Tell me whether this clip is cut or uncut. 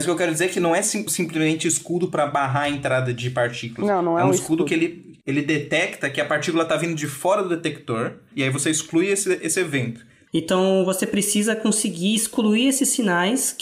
cut